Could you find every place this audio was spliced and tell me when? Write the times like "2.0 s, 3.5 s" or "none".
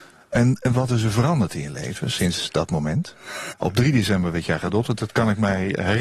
3.5 s

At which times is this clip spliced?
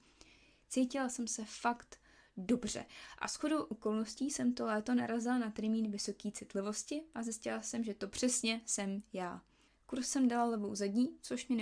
9.7 s

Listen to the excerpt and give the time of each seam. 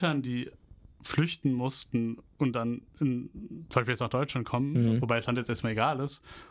none

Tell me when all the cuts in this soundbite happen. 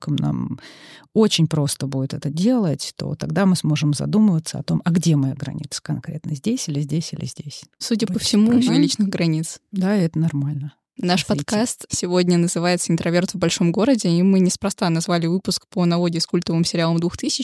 8.7 s

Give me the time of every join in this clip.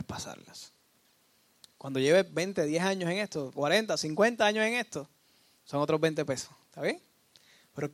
3.5 s

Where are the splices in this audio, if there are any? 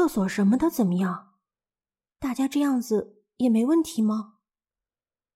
2.1 s

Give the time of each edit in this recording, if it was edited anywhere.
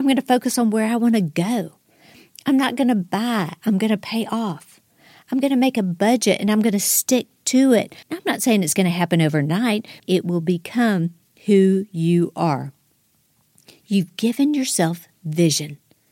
8.0 s, 10.0 s

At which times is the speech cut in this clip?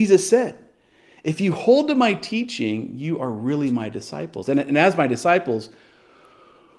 none

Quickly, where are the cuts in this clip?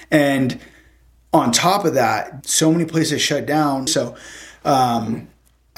2.4 s, 3.9 s

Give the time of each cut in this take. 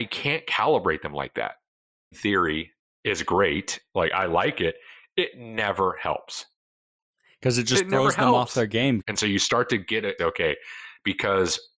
2.1 s, 9.0 s, 10.2 s

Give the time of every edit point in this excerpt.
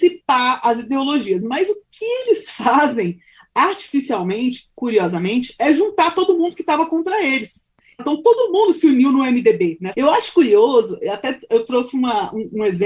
8.0 s, 9.9 s

